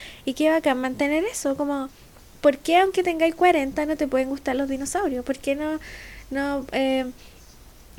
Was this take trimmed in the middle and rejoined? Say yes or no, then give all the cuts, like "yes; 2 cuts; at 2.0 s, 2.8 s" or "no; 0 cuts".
no; 0 cuts